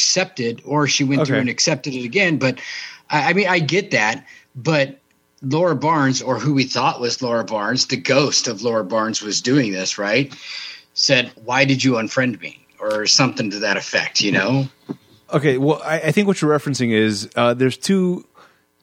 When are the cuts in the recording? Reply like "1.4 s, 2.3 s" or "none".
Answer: 11.4 s